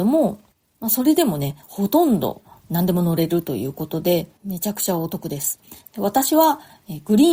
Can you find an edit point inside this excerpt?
no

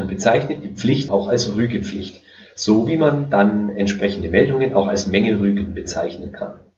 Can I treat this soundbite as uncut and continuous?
no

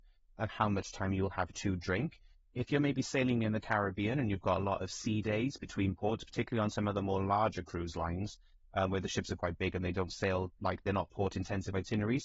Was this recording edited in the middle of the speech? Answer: no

